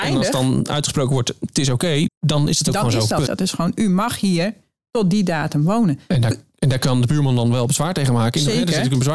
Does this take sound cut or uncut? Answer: cut